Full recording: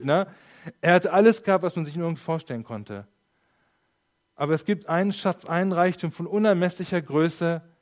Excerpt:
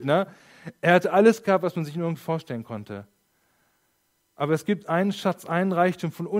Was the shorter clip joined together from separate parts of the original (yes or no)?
no